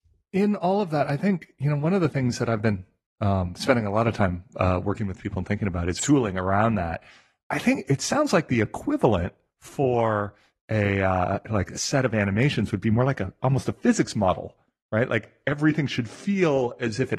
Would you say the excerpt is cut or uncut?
cut